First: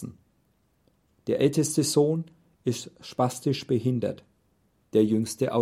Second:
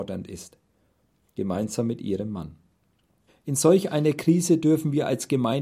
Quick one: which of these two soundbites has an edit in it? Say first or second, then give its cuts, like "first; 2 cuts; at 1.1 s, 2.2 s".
second; 1 cut; at 3.3 s